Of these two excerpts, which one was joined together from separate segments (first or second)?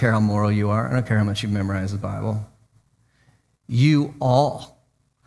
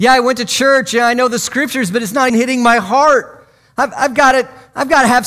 second